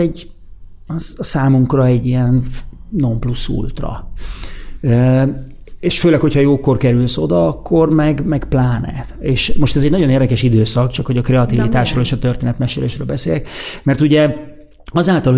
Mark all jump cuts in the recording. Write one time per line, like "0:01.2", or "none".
none